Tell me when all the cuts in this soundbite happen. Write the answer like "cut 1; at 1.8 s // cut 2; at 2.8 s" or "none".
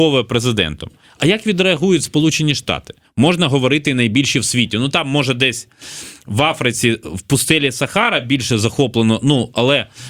cut 1; at 3.0 s